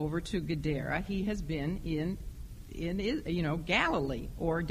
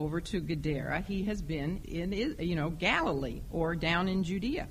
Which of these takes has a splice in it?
second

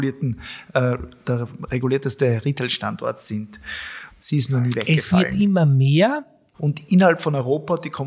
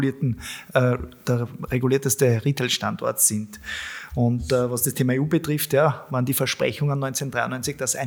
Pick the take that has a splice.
first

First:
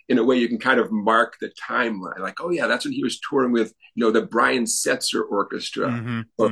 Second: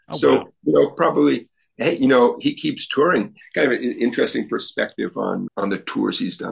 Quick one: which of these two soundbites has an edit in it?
second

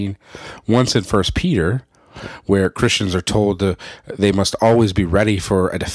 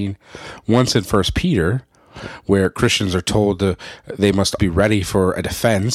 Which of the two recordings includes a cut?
second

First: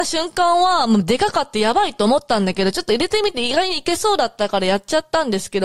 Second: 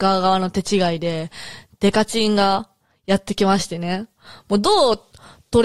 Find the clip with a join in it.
second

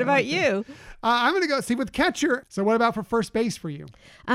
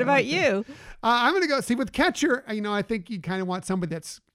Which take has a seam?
first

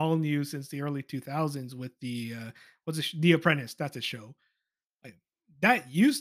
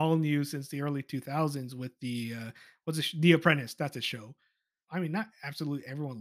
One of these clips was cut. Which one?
second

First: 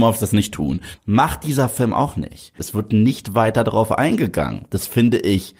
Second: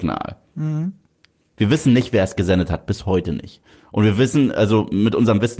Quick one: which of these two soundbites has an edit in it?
first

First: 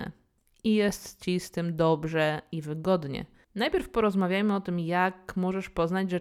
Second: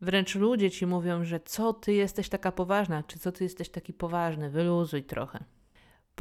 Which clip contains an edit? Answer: first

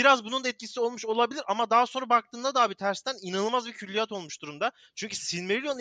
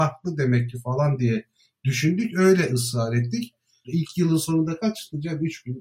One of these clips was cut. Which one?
second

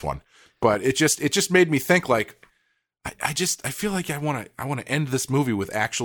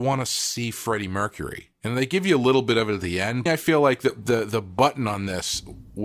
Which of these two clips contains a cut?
second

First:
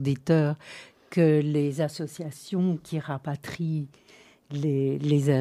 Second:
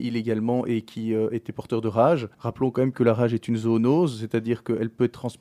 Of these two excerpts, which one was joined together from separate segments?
second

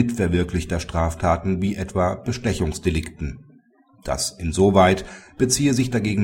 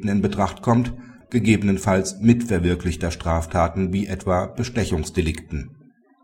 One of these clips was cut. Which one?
second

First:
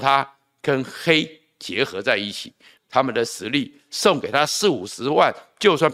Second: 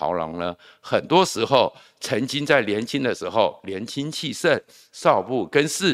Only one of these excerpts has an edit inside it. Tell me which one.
first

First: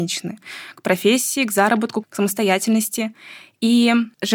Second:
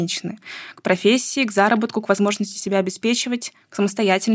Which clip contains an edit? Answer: first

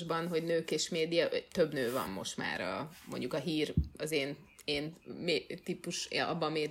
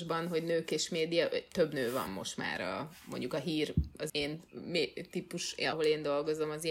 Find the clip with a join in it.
second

